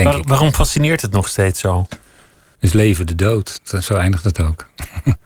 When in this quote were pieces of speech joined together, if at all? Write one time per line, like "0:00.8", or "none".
0:02.6